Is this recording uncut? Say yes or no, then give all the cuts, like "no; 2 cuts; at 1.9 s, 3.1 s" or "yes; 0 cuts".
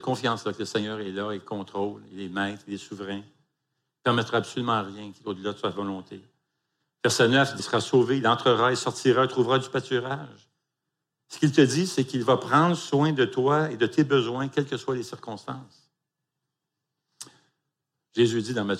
no; 1 cut; at 7.6 s